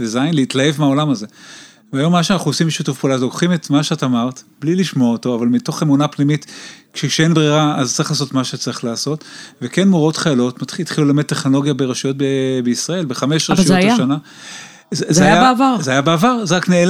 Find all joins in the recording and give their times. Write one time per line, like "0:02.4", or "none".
none